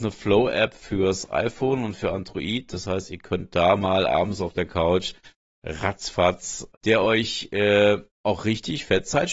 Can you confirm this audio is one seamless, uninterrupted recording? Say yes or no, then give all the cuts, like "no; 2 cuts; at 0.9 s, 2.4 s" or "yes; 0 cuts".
no; 2 cuts; at 6.7 s, 8.1 s